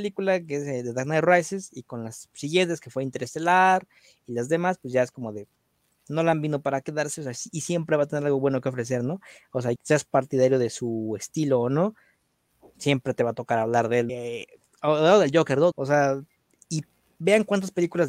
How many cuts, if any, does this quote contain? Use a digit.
3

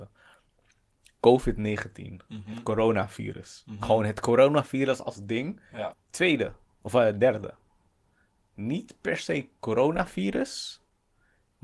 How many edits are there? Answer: 1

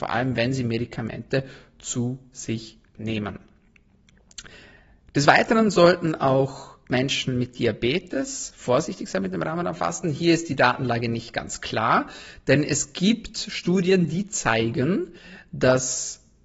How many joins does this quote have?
0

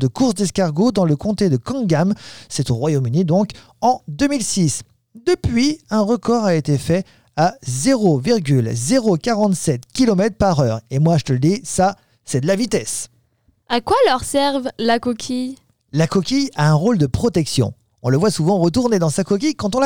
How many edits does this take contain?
1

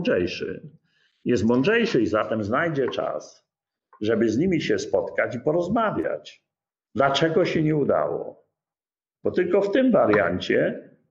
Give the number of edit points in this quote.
1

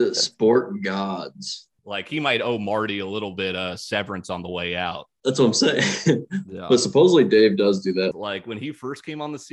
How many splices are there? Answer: 2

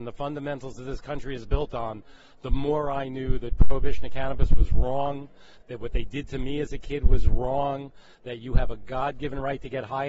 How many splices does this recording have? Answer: 0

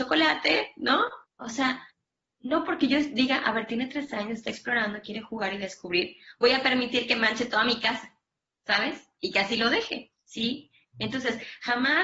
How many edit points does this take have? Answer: 2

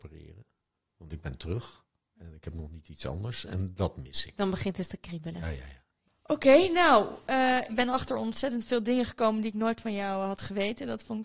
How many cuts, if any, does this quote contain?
0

